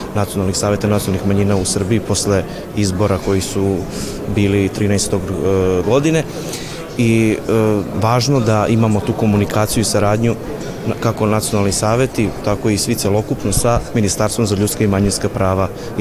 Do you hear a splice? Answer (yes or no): yes